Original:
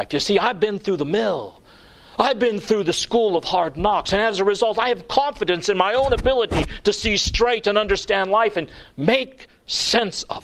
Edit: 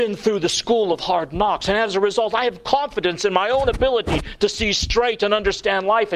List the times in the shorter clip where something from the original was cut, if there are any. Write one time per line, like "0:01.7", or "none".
none